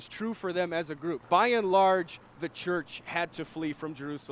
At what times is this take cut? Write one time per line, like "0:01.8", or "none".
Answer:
0:01.2